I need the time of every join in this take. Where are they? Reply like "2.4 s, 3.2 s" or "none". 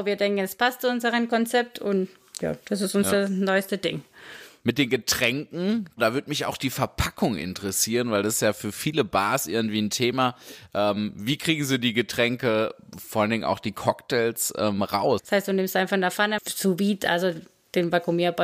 15.2 s, 16.4 s

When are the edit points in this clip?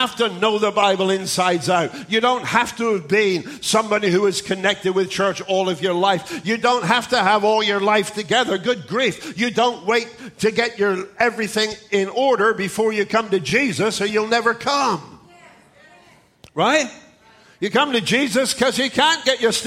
none

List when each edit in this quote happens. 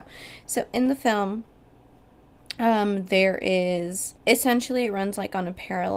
4.2 s

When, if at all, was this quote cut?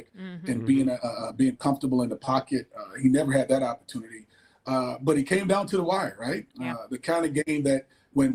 none

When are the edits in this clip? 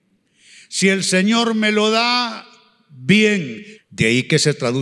3.7 s

